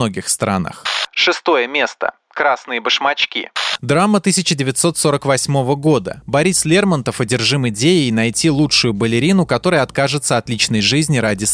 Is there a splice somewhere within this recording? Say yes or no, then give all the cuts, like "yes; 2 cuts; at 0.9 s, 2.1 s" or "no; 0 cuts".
no; 0 cuts